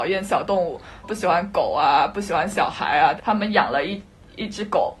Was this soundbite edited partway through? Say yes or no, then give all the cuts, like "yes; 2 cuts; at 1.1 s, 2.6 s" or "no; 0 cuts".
yes; 2 cuts; at 1.0 s, 3.2 s